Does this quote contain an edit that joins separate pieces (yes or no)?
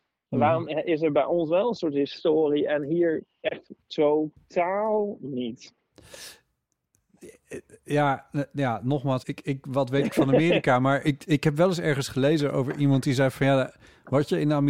yes